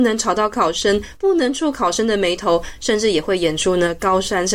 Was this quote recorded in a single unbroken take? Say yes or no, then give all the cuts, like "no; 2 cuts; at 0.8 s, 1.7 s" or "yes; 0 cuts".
no; 1 cut; at 1.1 s